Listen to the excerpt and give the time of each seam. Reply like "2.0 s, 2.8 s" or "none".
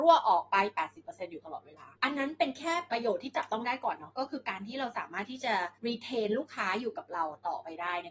2.0 s